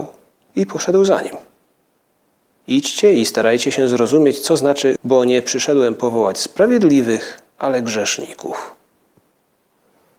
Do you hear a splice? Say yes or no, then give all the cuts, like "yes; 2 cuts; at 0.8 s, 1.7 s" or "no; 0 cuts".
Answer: yes; 2 cuts; at 2.6 s, 5.0 s